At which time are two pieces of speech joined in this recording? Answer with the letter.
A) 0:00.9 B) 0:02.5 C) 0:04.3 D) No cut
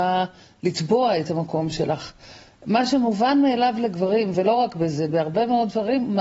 D